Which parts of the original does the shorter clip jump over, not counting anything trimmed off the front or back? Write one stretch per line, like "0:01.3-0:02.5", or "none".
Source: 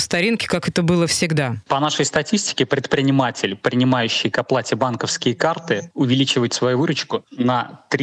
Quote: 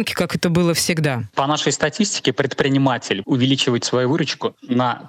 0:03.6-0:05.9